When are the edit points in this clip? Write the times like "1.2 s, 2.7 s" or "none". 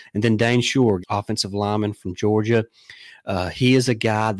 1.0 s